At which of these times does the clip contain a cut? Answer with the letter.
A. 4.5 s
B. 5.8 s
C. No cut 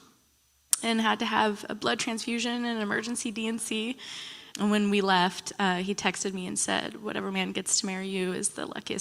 A